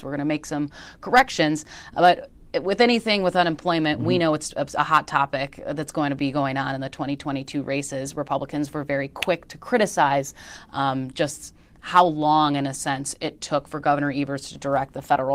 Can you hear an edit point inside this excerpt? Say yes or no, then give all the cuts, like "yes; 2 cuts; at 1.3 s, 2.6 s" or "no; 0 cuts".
no; 0 cuts